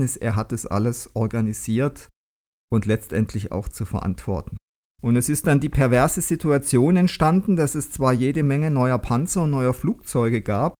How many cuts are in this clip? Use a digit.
1